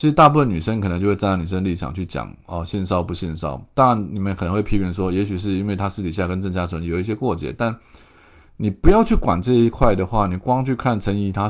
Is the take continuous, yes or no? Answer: yes